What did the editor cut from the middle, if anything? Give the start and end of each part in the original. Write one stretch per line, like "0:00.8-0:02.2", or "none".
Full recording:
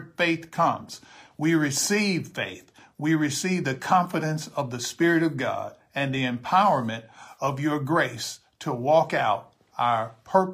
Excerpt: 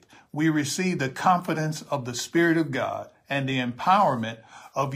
none